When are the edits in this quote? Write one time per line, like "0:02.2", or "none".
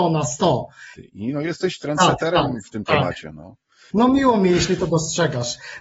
0:00.9
0:03.9

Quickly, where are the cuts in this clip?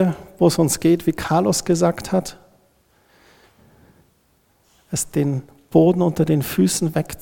none

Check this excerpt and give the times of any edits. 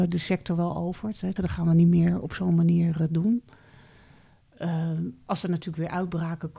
0:01.4

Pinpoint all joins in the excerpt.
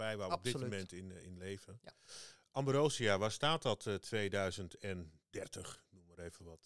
none

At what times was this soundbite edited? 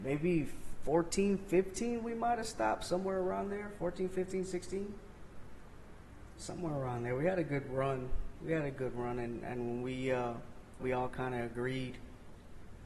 0:10.8

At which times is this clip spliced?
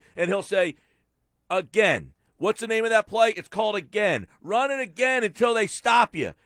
none

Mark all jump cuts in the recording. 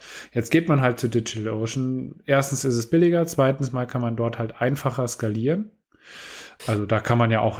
0:06.6

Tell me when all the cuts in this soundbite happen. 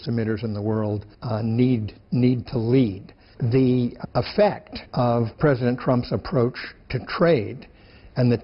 0:01.1

